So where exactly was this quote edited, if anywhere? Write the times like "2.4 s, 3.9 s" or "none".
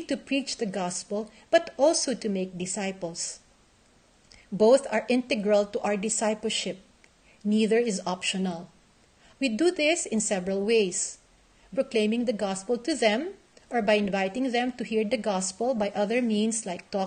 9.3 s, 11.7 s